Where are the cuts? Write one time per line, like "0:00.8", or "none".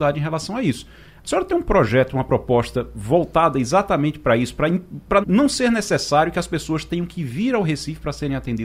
0:05.2